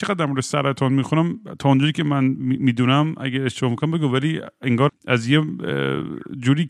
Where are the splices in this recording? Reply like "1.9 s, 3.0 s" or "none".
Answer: 4.9 s